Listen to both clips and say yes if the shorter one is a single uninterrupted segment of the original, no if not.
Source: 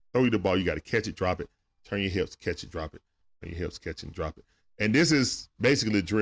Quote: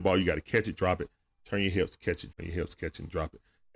no